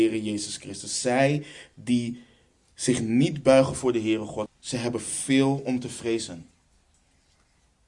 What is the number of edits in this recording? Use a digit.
1